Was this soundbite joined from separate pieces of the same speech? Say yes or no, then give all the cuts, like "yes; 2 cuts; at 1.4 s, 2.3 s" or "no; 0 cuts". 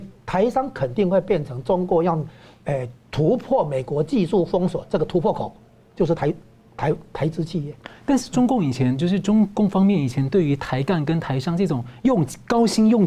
no; 0 cuts